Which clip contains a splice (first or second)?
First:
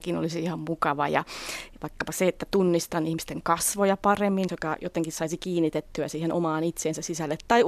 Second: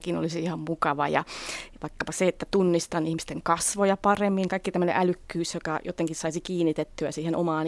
first